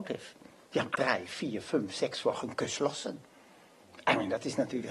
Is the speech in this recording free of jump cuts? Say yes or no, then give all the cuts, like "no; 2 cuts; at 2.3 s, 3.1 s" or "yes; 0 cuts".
no; 1 cut; at 0.9 s